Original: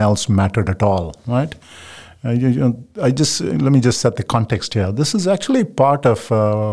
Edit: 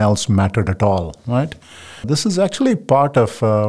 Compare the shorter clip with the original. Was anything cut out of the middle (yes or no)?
yes